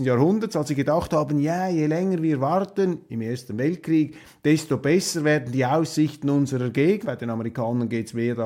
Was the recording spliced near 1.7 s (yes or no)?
no